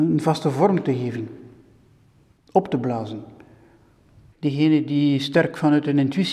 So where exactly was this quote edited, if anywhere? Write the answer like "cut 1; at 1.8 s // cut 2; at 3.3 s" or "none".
cut 1; at 4.3 s